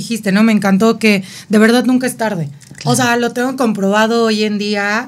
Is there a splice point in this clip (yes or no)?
no